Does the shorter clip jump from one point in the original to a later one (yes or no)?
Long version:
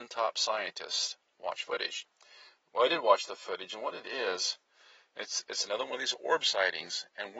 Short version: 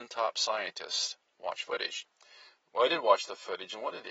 no